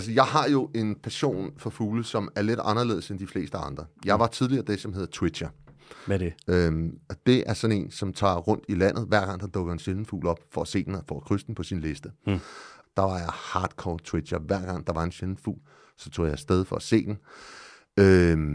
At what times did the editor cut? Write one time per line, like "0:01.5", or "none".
0:12.8